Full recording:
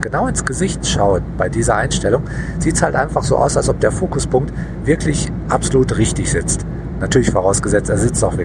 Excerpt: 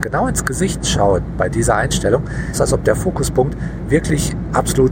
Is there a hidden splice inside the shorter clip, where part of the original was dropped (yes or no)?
yes